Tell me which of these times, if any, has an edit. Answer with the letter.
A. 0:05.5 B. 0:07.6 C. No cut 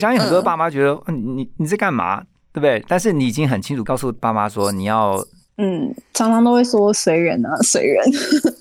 A